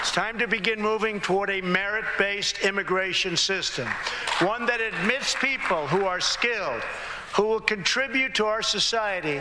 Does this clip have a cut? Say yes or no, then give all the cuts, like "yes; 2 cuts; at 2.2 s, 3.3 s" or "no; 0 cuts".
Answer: yes; 1 cut; at 7.3 s